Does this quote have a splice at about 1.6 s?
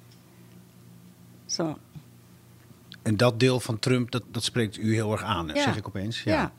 no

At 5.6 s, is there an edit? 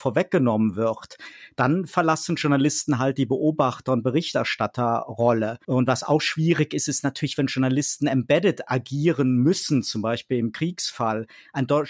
yes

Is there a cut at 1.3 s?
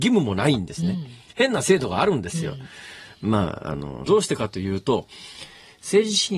no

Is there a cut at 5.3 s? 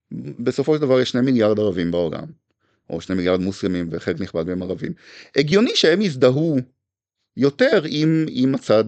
no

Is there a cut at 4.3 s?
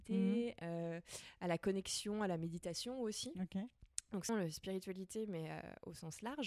yes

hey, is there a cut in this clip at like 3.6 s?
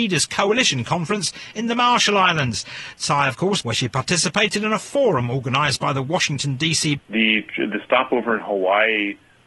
yes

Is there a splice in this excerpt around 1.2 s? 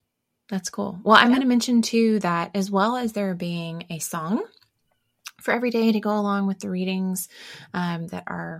no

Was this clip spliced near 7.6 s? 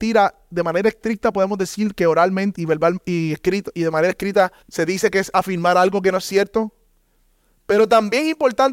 no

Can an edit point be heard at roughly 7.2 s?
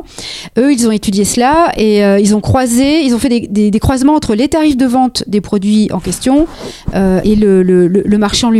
yes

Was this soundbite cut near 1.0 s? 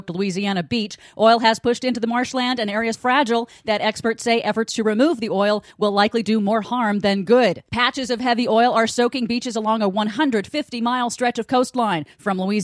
no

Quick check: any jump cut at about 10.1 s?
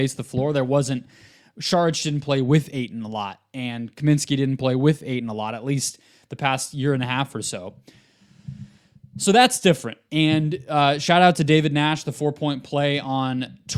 yes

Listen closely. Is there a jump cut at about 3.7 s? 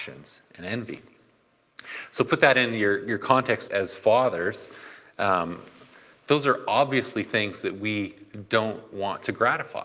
yes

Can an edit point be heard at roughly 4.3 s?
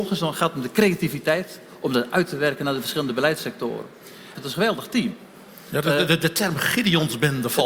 yes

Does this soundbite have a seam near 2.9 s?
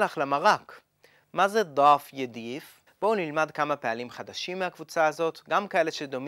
yes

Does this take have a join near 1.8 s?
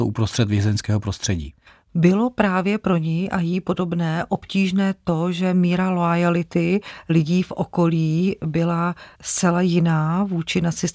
no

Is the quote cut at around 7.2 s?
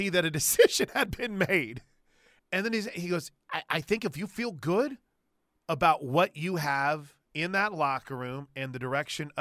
yes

